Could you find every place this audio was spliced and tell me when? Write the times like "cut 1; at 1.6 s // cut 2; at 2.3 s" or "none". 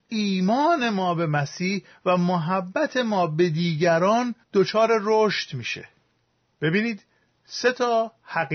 cut 1; at 4.4 s